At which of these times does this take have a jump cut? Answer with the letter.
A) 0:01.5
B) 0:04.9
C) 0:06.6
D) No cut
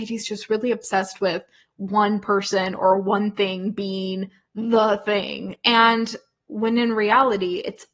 D